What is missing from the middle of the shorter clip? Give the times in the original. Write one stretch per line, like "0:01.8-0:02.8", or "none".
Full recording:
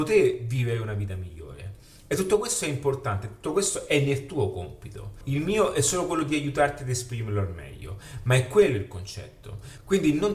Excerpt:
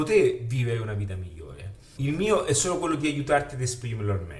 0:02.0-0:05.2